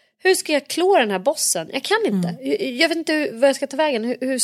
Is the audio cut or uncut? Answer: uncut